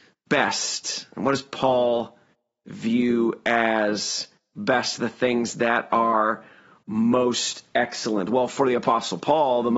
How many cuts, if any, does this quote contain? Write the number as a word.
zero